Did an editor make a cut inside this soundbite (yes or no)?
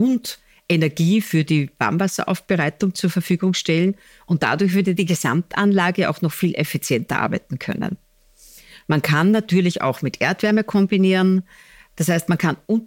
no